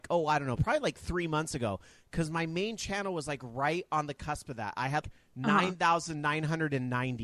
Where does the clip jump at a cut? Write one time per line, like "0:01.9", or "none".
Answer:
0:05.0